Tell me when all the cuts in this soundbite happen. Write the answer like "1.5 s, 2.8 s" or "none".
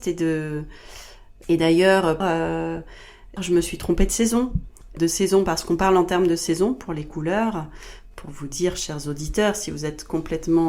2.2 s, 3.4 s